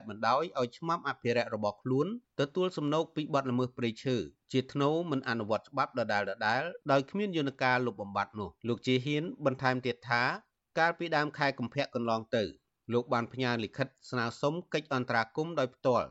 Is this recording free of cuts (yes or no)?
no